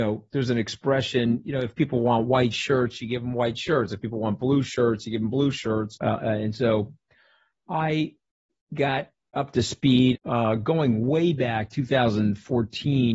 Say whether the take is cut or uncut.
cut